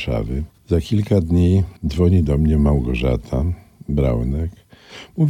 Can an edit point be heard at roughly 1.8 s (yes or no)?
yes